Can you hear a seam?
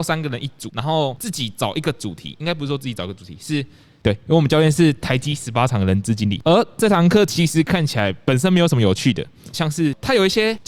yes; 2 cuts; at 4.0 s, 9.5 s

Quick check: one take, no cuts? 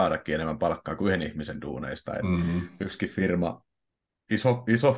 yes; 0 cuts

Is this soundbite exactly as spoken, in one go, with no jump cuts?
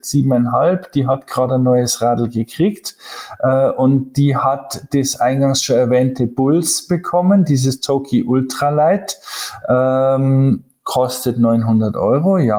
yes; 0 cuts

